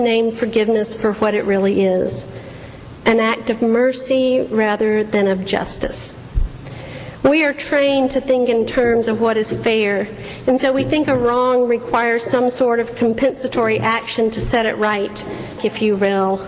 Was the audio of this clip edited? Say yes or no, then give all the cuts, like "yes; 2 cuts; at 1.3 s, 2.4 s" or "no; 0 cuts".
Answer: yes; 1 cut; at 15.6 s